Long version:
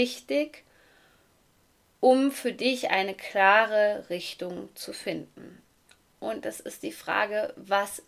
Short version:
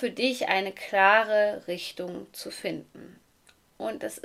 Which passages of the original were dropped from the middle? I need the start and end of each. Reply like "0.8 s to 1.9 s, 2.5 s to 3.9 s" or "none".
none